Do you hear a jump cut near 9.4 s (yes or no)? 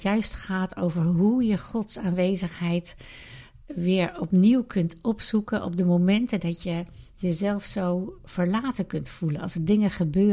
no